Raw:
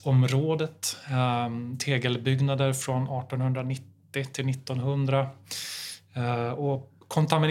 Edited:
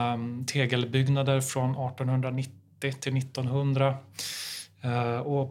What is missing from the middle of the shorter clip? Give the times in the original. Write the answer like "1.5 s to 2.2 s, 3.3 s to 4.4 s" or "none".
none